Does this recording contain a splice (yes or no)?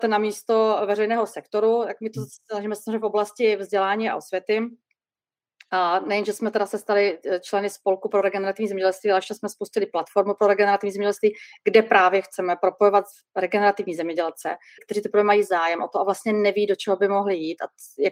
yes